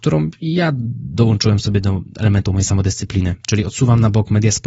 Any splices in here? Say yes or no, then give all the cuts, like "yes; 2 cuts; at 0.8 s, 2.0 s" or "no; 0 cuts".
no; 0 cuts